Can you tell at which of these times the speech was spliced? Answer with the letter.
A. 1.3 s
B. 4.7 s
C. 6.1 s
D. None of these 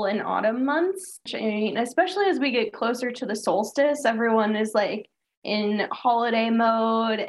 A